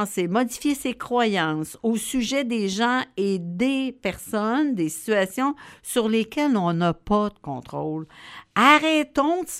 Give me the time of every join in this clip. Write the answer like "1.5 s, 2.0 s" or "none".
none